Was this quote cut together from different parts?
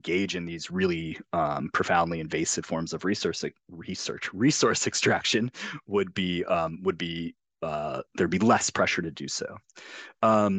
yes; 1 cut; at 3.6 s

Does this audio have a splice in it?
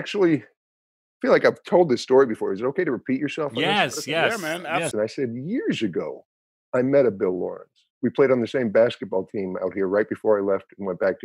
yes; 2 cuts; at 4.9 s, 7.9 s

